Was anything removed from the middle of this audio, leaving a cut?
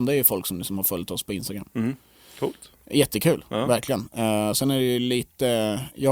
no; 0 cuts

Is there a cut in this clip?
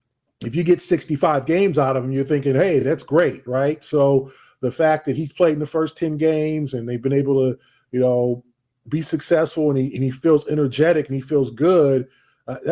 no; 0 cuts

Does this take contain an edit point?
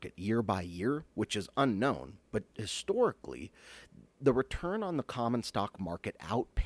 no; 0 cuts

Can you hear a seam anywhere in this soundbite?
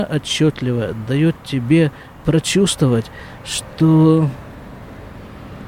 no; 0 cuts

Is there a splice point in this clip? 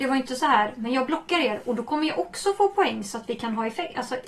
no; 0 cuts

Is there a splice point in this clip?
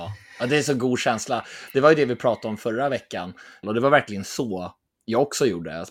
yes; 1 cut; at 3.6 s

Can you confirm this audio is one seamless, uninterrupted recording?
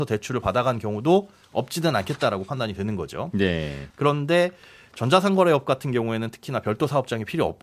no; 1 cut; at 3.9 s

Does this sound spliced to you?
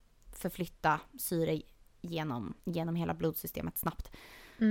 yes; 1 cut; at 2.6 s

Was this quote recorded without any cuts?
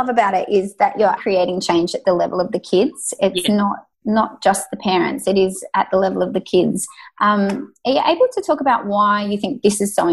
no; 2 cuts; at 1.2 s, 3.9 s

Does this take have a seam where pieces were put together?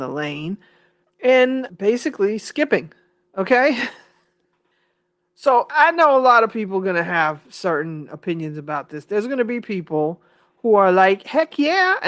no; 0 cuts

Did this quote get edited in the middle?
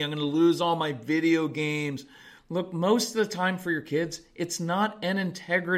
yes; 1 cut; at 2.4 s

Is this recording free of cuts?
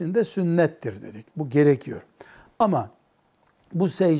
yes; 0 cuts

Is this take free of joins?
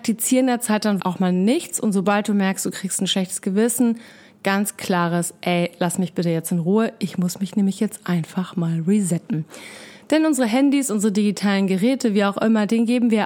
no; 1 cut; at 1.0 s

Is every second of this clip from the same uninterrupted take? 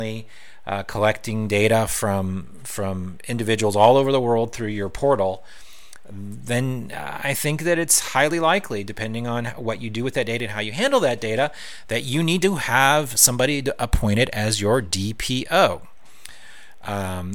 yes; 0 cuts

